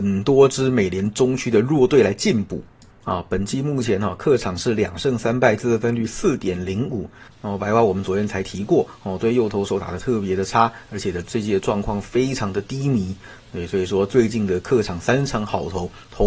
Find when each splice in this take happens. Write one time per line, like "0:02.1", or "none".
0:07.3